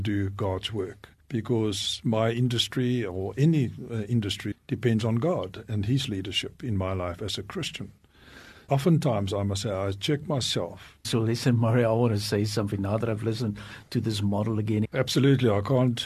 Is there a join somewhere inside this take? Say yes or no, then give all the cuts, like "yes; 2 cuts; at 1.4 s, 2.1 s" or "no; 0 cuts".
yes; 3 cuts; at 4.5 s, 11.0 s, 14.8 s